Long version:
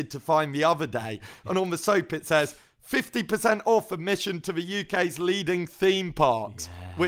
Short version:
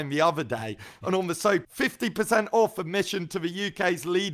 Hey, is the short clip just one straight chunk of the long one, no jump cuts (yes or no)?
no